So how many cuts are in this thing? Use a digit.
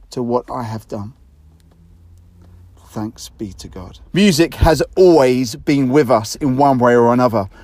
2